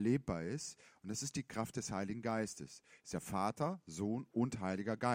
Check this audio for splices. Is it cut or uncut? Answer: uncut